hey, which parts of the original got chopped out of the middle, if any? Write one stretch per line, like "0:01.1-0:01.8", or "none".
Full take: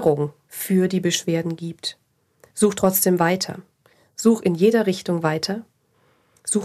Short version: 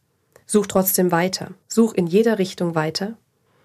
0:03.7-0:04.1